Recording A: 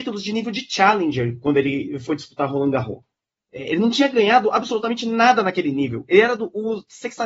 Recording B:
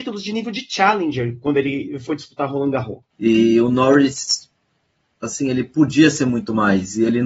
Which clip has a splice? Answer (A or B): B